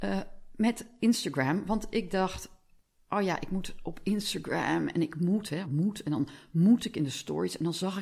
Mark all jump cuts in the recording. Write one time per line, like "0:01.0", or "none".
0:05.6